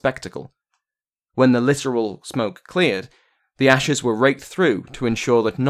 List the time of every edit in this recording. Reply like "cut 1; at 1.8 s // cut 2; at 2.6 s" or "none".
cut 1; at 3.4 s